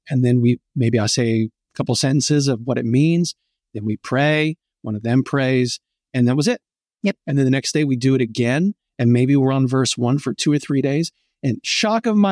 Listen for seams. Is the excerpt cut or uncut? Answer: uncut